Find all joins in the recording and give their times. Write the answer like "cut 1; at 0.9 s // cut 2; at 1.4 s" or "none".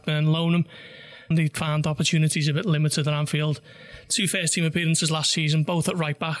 cut 1; at 1.3 s